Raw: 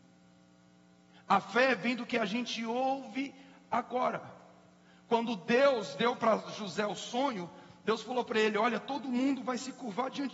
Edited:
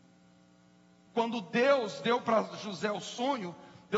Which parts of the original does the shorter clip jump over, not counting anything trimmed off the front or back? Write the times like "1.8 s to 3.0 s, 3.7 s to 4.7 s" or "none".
1.1 s to 5.0 s